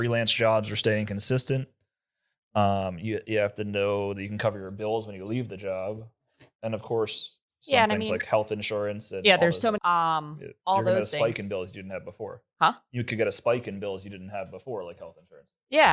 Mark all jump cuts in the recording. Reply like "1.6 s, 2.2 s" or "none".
9.8 s